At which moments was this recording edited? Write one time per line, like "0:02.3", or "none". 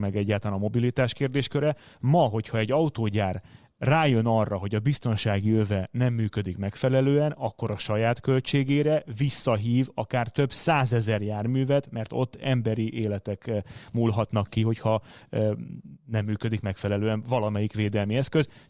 none